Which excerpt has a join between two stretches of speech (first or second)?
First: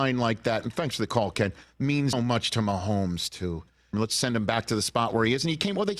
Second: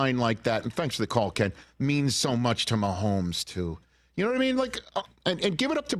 first